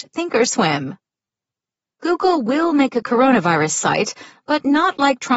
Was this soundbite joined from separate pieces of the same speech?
no; 0 cuts

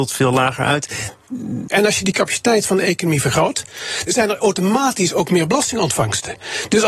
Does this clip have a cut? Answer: yes; 2 cuts; at 1.7 s, 4.1 s

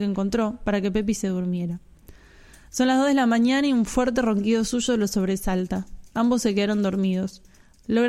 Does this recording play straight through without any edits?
yes; 0 cuts

